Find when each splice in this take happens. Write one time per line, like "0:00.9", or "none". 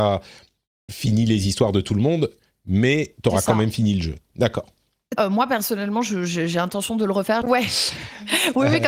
0:05.2
0:07.4